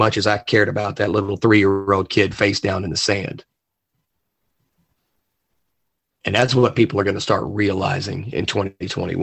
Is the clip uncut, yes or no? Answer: yes